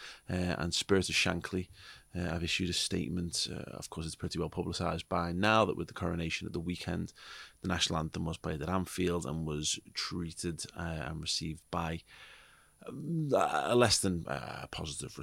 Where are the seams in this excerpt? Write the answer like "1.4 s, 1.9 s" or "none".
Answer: none